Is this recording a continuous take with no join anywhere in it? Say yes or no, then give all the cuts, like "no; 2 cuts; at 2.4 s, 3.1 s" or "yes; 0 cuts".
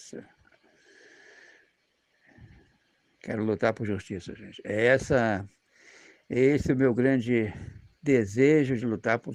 yes; 0 cuts